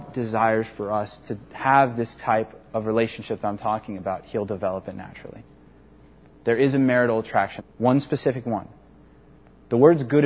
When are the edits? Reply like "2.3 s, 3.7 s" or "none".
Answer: 7.6 s